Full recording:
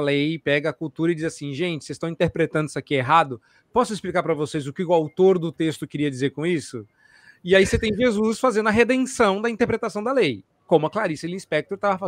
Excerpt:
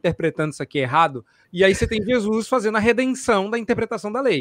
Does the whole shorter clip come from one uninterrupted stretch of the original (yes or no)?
no